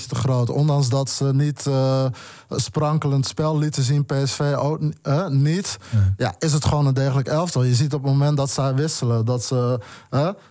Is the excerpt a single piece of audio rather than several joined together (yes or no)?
yes